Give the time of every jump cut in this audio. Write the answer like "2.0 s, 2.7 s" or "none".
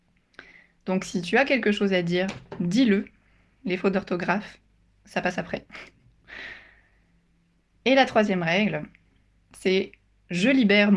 none